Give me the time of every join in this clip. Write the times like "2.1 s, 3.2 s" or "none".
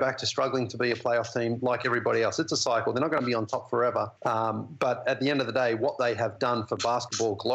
4.2 s

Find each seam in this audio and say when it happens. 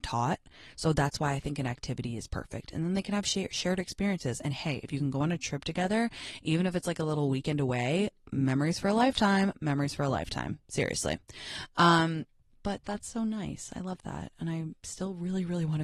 none

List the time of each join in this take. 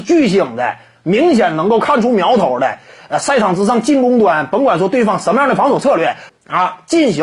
6.3 s

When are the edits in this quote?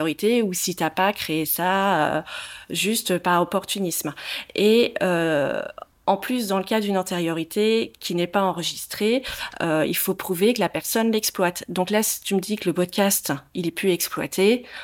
none

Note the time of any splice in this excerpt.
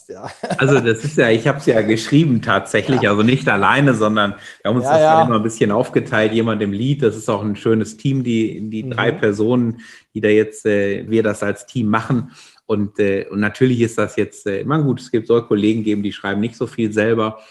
11.1 s

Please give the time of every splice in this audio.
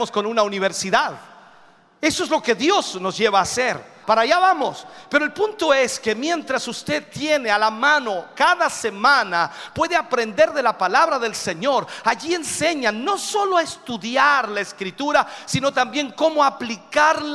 4.0 s

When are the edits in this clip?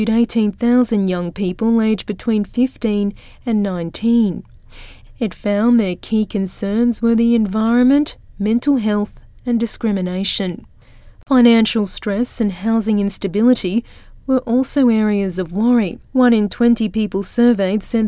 16.0 s

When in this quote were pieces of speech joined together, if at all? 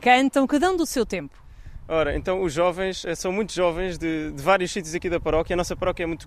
none

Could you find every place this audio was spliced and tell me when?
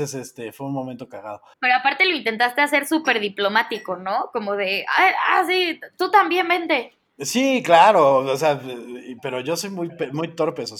1.5 s

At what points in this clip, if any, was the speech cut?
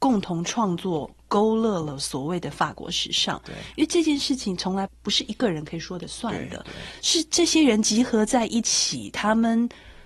4.9 s

